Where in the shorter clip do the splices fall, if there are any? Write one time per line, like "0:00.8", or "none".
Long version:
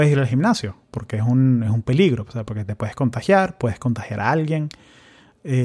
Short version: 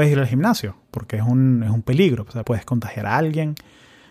0:02.4